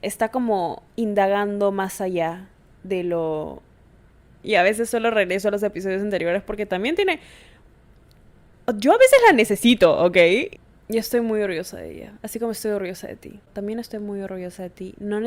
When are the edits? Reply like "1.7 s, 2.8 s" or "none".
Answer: 4.4 s